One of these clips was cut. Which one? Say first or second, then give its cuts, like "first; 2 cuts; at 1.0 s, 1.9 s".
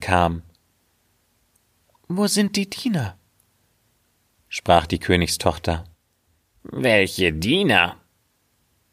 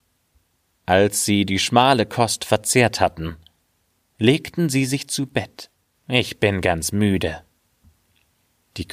second; 1 cut; at 5.9 s